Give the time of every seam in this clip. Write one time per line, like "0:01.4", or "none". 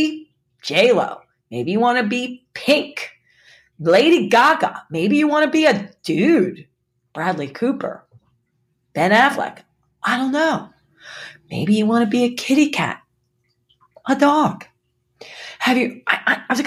none